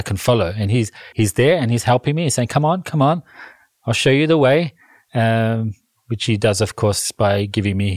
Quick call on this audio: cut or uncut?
cut